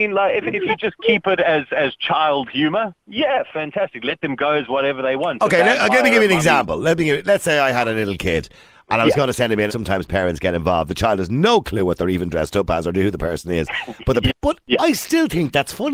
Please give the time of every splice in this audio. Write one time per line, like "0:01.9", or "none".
0:09.7
0:14.3